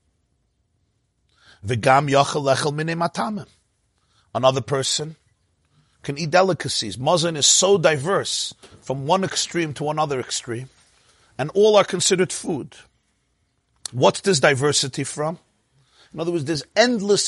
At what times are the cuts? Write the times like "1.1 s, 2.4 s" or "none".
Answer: none